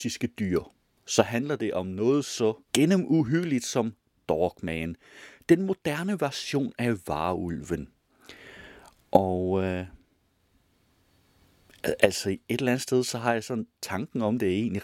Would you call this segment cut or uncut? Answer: cut